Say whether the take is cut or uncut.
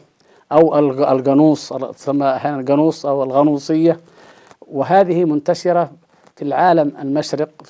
uncut